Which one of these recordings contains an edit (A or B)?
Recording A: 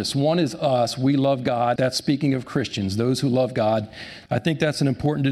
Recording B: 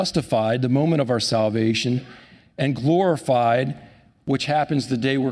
A